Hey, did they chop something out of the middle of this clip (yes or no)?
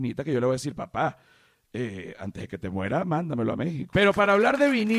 yes